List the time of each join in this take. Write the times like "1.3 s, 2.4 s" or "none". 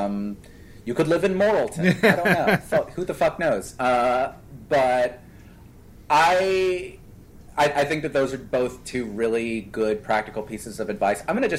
none